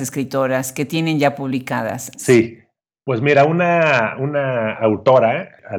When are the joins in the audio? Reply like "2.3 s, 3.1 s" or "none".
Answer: 2.1 s